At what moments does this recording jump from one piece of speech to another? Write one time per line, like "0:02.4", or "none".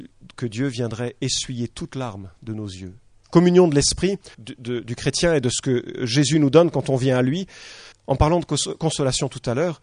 0:03.2
0:04.3
0:07.9